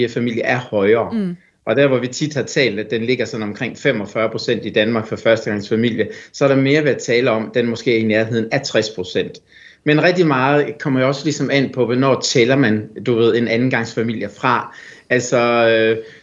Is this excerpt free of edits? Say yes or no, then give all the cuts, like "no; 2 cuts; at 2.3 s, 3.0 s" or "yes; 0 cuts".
yes; 0 cuts